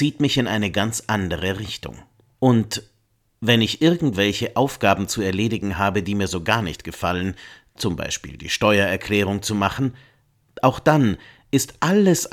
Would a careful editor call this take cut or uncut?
cut